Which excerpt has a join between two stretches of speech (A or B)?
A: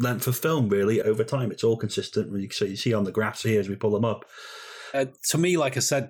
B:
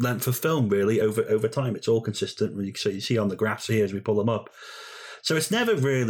A